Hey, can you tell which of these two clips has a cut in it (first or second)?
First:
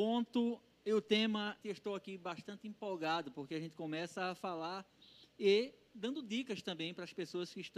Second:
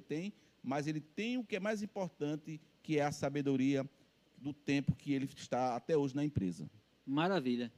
first